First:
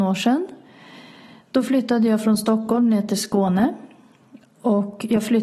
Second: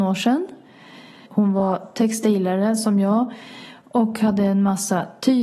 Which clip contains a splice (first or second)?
second